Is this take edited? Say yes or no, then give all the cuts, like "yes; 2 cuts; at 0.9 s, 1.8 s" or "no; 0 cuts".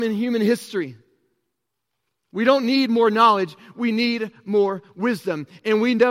no; 0 cuts